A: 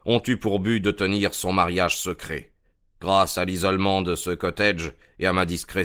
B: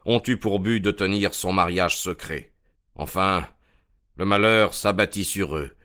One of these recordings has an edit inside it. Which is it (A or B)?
B